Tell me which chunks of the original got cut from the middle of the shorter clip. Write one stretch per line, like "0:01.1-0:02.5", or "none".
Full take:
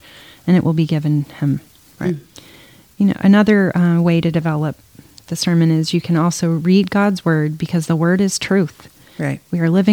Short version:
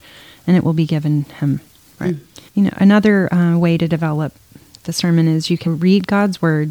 0:02.5-0:02.9
0:06.1-0:06.5

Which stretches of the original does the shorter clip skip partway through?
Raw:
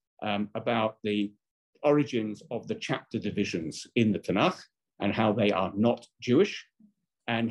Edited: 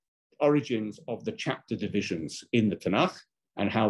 none

